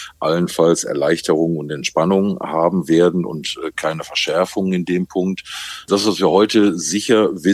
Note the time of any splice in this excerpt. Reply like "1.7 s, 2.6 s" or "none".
none